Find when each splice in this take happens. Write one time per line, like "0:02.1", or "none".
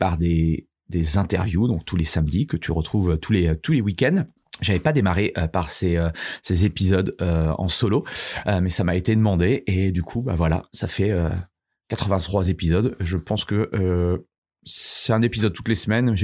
none